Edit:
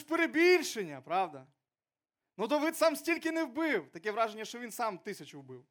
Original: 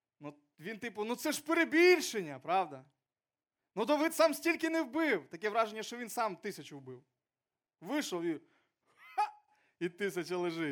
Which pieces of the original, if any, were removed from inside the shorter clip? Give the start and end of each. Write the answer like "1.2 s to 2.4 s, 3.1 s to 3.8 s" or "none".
none